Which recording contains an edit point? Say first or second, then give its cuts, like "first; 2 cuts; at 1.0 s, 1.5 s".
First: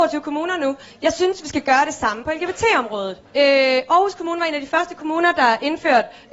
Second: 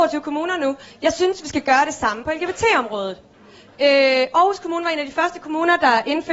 first; 1 cut; at 3.2 s